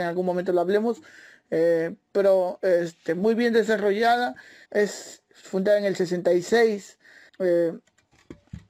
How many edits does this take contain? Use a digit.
2